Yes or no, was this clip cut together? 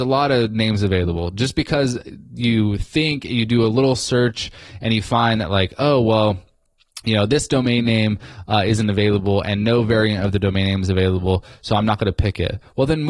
no